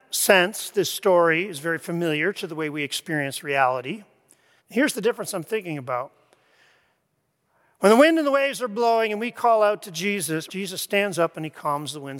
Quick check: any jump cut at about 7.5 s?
no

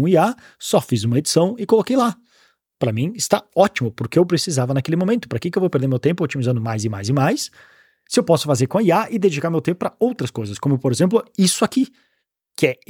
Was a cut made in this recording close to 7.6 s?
no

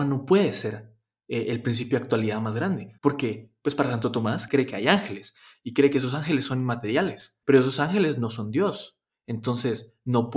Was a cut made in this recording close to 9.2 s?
no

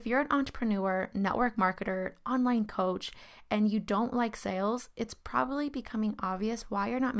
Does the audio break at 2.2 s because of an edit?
no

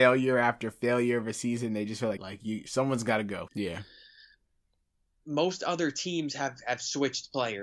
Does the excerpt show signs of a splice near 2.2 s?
yes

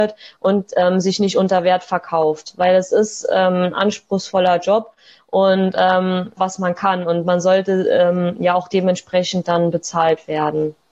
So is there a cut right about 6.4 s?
yes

